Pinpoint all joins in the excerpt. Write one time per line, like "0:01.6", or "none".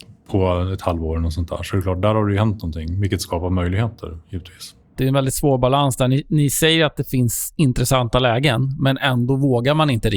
0:05.0

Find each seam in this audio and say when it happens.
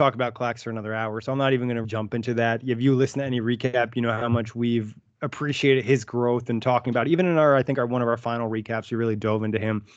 0:01.8

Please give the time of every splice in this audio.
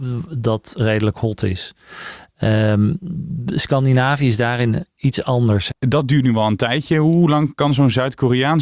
0:05.7

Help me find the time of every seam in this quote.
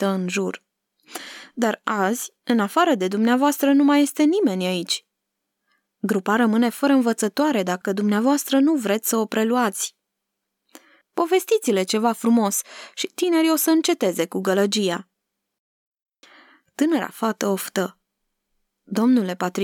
0:11.0

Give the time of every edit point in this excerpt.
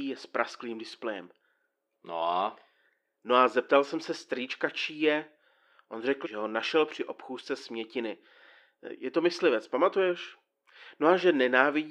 0:01.9
0:06.2

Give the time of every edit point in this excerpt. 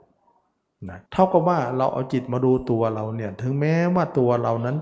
0:01.1

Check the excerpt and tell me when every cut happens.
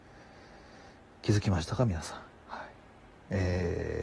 none

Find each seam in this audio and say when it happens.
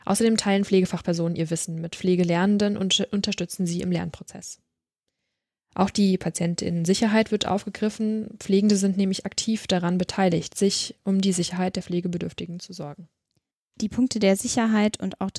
none

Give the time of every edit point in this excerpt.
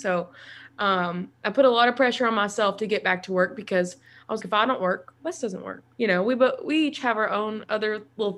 0:04.4
0:05.9

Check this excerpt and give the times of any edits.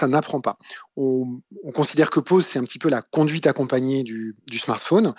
none

